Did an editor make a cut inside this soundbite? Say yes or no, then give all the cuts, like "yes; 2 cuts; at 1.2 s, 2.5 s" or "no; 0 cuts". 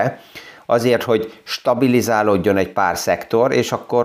no; 0 cuts